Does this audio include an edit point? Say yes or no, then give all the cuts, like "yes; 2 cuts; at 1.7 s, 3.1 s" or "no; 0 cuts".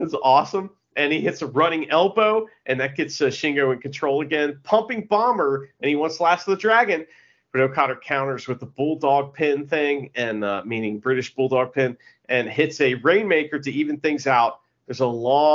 no; 0 cuts